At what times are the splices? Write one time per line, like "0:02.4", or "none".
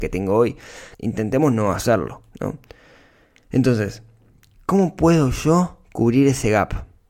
0:00.9